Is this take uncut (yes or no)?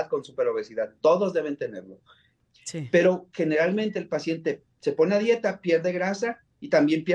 no